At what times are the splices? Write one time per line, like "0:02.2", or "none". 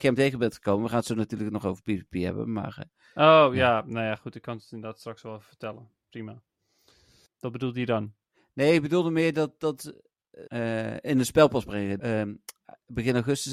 0:07.3
0:10.5
0:12.0